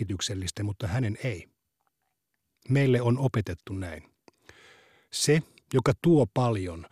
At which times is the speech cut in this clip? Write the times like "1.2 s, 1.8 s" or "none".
none